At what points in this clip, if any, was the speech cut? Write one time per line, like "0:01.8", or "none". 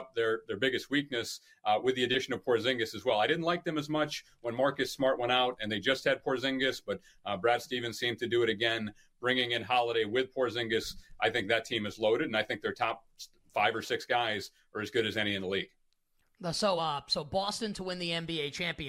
none